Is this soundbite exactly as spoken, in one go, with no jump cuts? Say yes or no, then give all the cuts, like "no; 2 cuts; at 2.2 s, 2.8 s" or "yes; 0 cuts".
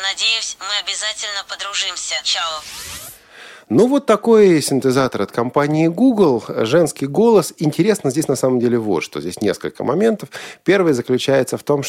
yes; 0 cuts